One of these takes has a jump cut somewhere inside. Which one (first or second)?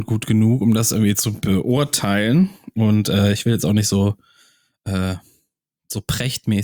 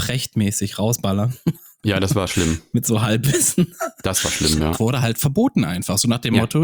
second